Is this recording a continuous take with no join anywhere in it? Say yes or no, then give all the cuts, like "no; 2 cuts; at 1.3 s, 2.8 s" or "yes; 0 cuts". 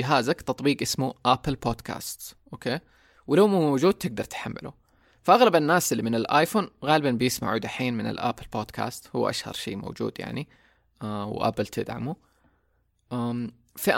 yes; 0 cuts